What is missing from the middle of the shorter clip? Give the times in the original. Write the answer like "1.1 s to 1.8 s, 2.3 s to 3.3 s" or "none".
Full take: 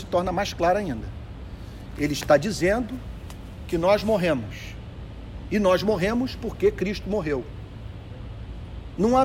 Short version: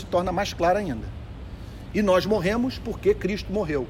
1.9 s to 5.5 s